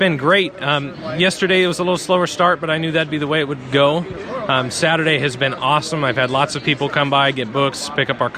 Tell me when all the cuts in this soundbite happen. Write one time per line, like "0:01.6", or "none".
none